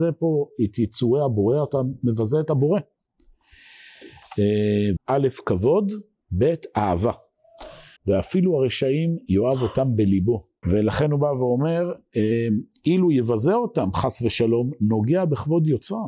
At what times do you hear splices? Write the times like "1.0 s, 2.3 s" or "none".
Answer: 5.0 s, 8.0 s, 10.6 s